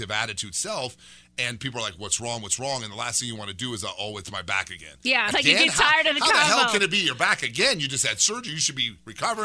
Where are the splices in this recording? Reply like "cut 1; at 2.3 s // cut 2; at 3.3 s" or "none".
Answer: cut 1; at 5.3 s